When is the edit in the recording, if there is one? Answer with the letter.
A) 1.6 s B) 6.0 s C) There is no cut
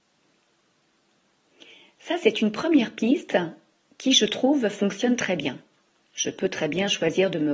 B